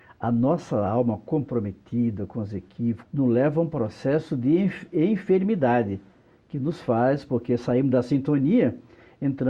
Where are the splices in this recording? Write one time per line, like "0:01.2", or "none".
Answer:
0:03.0